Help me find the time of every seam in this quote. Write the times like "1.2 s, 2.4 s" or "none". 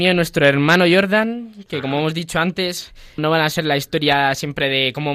3.2 s